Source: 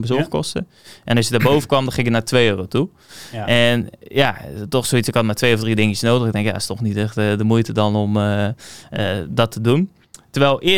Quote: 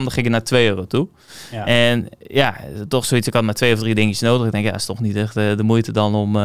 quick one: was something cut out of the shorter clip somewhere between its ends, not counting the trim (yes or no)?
no